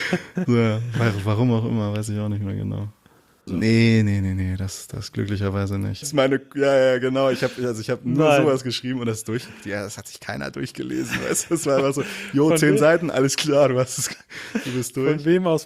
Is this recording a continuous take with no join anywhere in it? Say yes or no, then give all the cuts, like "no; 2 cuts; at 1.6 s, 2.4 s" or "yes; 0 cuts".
no; 2 cuts; at 3.5 s, 6.0 s